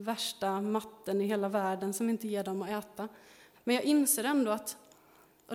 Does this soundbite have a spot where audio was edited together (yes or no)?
yes